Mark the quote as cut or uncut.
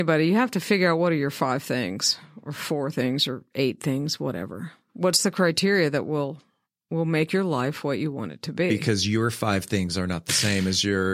uncut